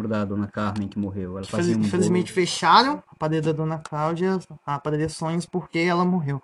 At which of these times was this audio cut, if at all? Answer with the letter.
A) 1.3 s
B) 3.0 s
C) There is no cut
B